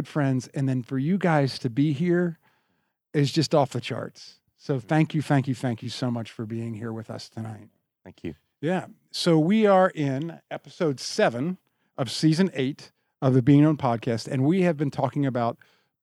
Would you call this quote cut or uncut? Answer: uncut